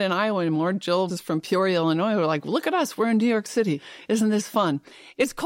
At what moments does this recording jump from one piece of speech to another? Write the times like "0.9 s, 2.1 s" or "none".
1.1 s

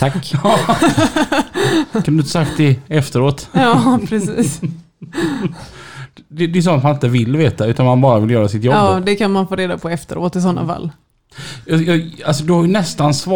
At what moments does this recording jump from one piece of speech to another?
none

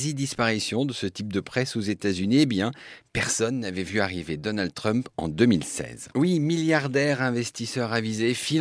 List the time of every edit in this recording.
6.1 s

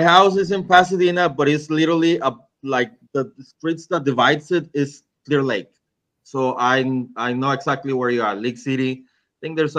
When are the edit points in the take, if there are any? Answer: none

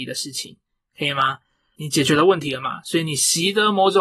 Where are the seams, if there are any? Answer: 1.8 s

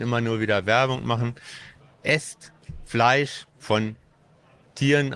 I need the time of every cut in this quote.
none

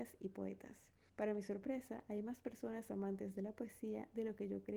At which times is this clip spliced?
1.1 s

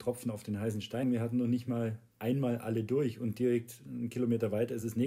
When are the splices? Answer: 1.0 s

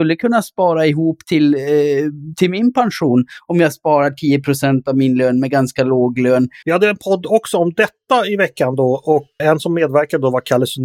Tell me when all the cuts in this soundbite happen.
6.6 s, 9.4 s

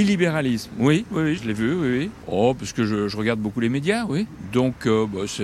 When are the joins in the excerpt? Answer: 1.4 s

